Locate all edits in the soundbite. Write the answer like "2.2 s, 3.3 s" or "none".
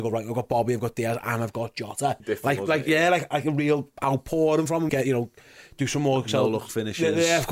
2.2 s, 4.9 s

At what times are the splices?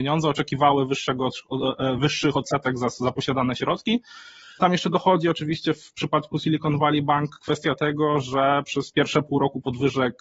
2.0 s, 4.6 s

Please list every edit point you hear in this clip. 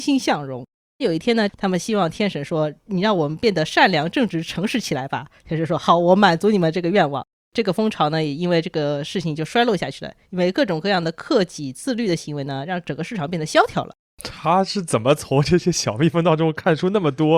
1.5 s

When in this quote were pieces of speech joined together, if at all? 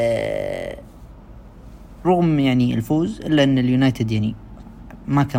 2.0 s

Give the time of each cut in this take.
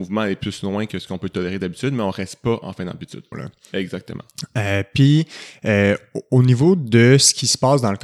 3.3 s

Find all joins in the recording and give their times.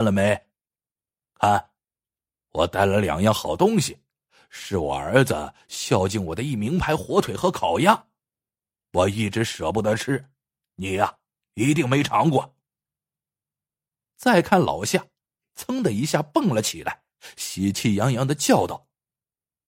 none

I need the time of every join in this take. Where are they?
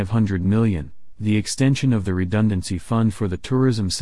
none

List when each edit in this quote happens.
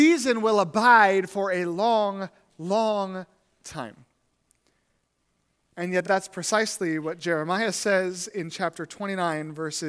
none

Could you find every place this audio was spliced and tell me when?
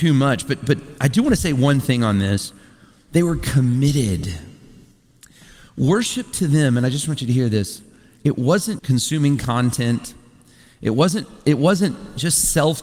8.8 s

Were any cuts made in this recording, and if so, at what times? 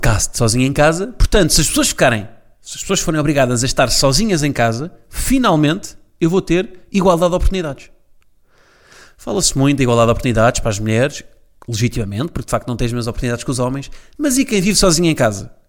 none

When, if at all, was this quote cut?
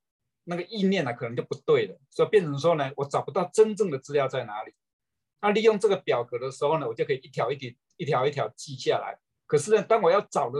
5.4 s, 9.3 s

